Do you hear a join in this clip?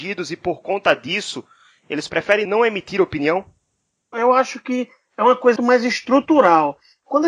yes; 2 cuts; at 4.1 s, 5.6 s

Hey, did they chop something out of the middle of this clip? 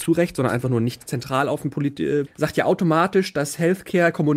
yes; 1 cut; at 2.3 s

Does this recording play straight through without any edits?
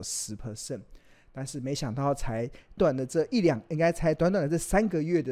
no; 1 cut; at 2.8 s

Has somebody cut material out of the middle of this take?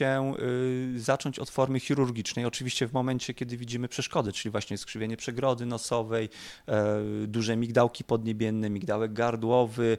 no; 0 cuts

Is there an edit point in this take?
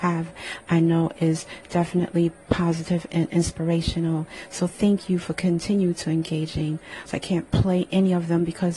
yes; 1 cut; at 7.1 s

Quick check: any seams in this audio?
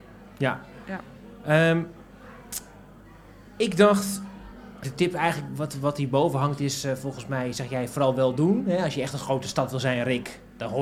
yes; 1 cut; at 4.8 s

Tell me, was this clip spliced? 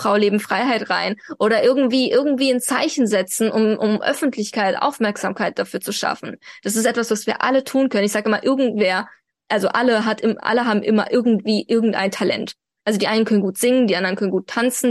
no; 0 cuts

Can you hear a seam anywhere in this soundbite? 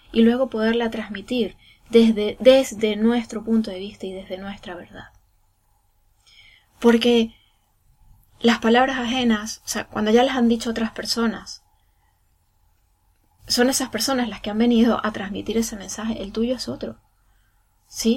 yes; 1 cut; at 13.4 s

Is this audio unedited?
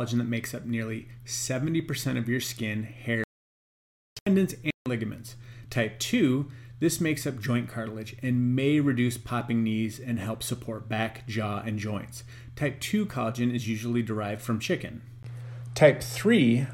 no; 1 cut; at 5.7 s

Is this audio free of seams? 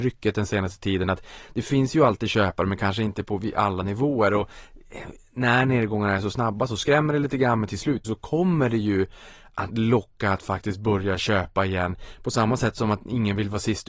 no; 1 cut; at 8.0 s

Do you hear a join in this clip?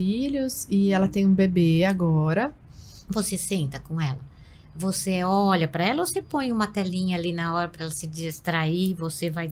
yes; 1 cut; at 3.1 s

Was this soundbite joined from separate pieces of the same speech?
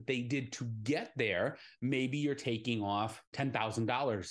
no; 0 cuts

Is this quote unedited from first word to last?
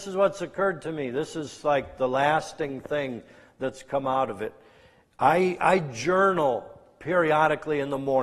yes; 0 cuts

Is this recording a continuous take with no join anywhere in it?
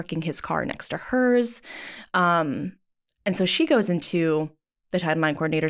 yes; 0 cuts

